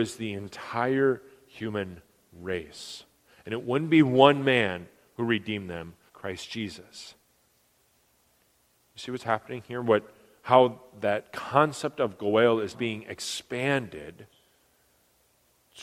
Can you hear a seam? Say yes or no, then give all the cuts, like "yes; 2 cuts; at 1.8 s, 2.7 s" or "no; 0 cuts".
yes; 3 cuts; at 6.1 s, 8.9 s, 12.7 s